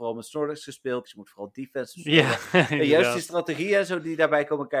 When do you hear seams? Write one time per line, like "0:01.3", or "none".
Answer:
0:01.0